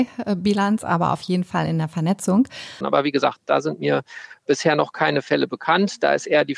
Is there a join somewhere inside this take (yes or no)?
yes